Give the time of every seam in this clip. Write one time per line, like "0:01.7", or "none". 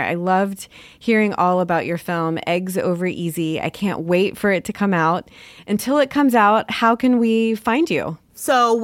none